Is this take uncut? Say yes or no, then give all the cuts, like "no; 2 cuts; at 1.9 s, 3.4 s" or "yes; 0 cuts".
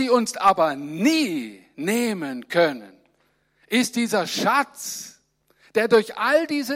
yes; 0 cuts